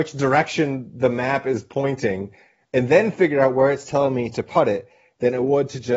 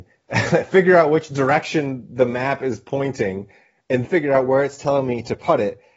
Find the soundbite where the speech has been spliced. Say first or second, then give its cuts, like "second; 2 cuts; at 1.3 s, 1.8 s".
second; 1 cut; at 4.0 s